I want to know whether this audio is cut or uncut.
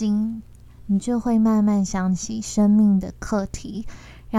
uncut